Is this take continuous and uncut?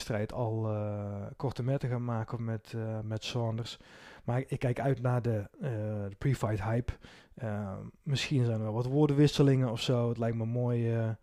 yes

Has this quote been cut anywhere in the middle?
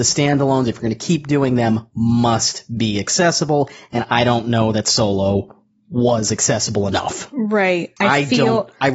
yes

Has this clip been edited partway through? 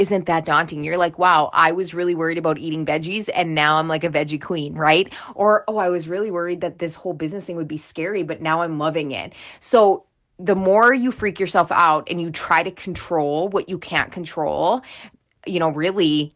no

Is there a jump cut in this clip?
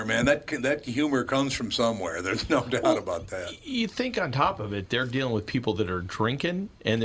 no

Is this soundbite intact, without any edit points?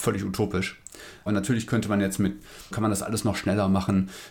no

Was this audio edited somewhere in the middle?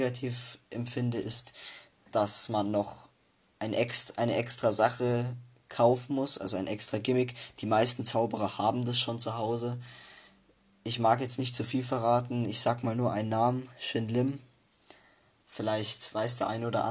no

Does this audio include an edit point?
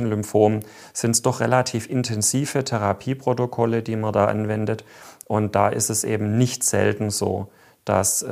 no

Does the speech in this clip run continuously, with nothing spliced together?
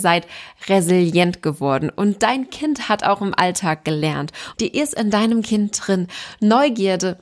no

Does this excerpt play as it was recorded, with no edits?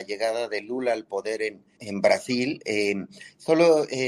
no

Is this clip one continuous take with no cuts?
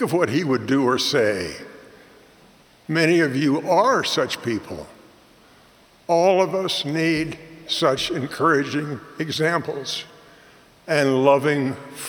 no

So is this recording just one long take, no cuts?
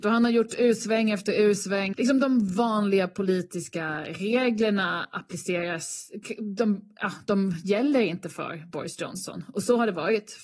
no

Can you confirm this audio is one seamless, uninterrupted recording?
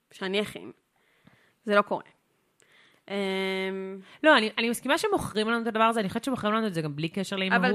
yes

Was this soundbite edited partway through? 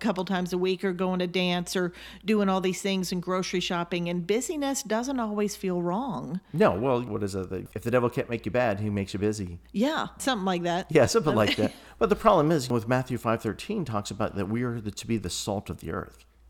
no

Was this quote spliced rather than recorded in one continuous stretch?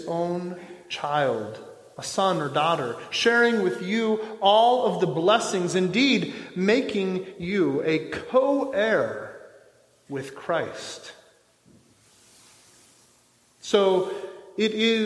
no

